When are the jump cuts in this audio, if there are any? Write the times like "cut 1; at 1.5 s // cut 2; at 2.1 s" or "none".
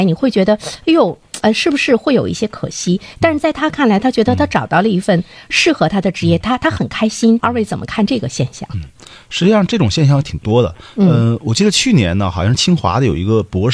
cut 1; at 7.4 s